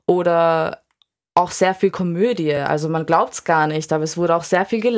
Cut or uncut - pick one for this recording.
uncut